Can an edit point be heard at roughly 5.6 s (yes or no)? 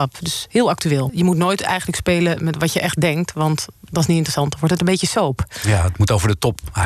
no